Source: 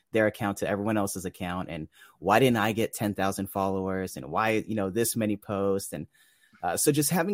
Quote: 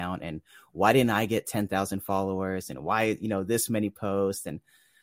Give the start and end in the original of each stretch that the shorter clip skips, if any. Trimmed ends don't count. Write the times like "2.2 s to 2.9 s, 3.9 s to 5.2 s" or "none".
none